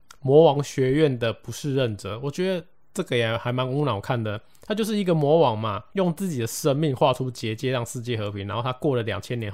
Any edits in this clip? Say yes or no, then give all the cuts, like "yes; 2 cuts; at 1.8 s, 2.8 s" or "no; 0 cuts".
yes; 1 cut; at 5.9 s